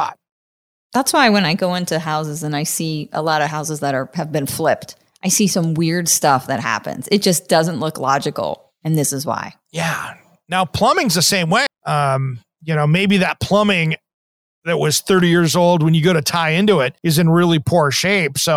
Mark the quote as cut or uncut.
cut